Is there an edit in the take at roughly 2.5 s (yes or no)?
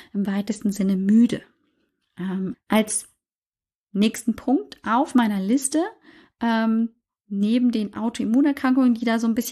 yes